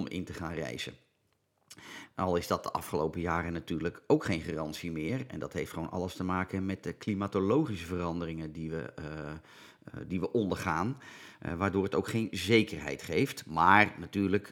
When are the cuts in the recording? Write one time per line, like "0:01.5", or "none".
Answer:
0:02.1